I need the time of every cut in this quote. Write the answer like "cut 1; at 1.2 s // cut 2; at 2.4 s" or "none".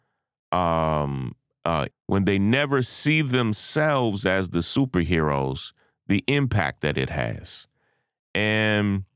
cut 1; at 1.9 s